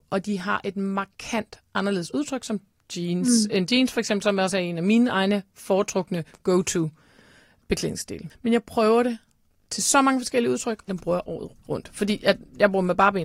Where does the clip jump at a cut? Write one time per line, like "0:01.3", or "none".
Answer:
0:08.3
0:10.9

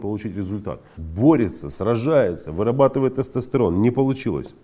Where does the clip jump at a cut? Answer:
0:00.9

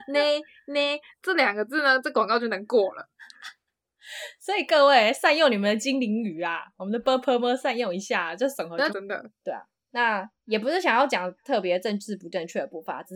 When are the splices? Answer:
0:08.9

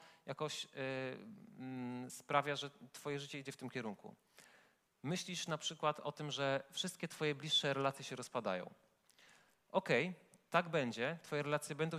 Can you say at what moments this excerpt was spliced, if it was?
none

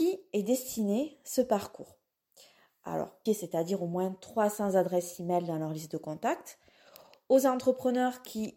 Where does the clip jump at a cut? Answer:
0:03.3

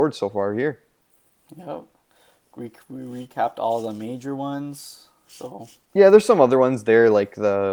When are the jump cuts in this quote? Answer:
none

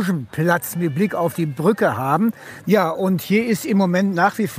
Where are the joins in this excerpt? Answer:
0:02.6

